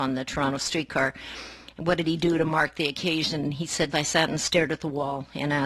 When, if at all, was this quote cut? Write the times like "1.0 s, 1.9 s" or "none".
3.9 s